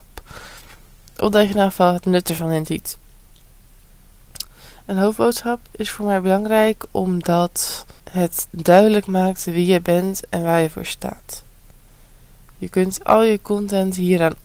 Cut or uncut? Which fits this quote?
cut